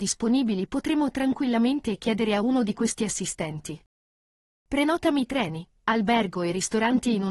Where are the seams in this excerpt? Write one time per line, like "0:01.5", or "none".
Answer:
none